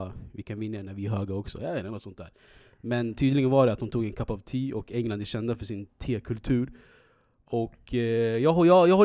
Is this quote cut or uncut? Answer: uncut